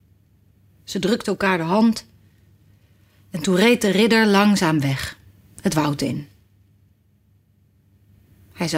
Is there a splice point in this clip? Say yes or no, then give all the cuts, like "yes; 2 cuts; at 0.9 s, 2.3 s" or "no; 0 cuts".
no; 0 cuts